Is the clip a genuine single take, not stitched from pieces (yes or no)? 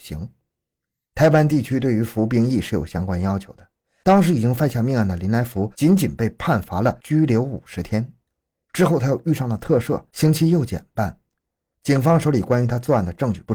no